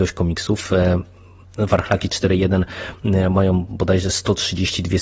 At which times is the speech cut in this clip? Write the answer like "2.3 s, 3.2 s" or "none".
none